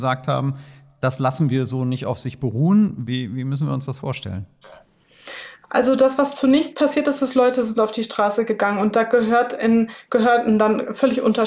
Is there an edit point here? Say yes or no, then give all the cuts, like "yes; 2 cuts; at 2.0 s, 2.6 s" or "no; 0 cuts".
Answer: yes; 1 cut; at 3.1 s